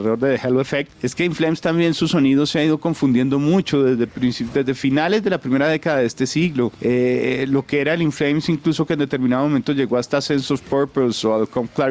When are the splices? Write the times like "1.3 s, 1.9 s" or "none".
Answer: none